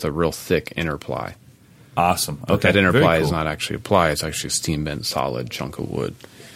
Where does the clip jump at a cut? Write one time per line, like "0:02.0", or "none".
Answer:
none